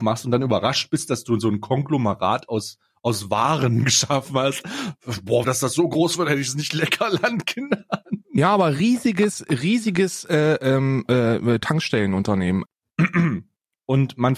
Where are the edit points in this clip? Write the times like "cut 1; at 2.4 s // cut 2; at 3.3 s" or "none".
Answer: cut 1; at 5.4 s // cut 2; at 12.6 s